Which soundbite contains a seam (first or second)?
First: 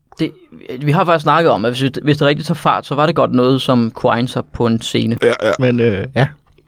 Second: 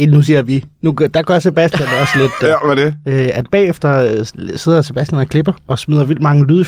first